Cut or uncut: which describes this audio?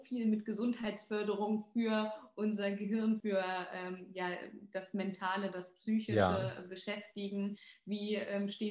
cut